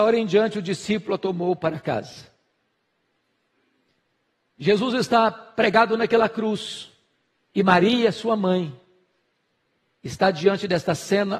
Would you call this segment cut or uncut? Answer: uncut